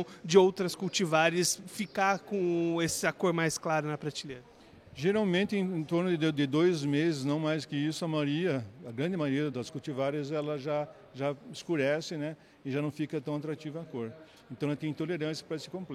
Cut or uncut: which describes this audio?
cut